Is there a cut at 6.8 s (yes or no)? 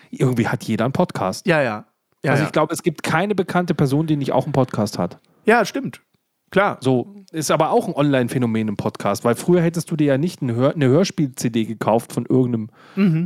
no